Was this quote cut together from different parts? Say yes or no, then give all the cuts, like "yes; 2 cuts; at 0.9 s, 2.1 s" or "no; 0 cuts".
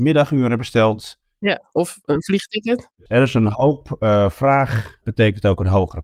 yes; 1 cut; at 5.0 s